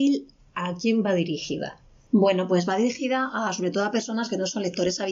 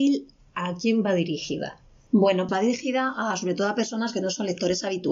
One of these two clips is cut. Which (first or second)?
second